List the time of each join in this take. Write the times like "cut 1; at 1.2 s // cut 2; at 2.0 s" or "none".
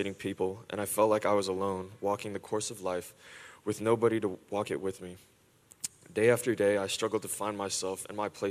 none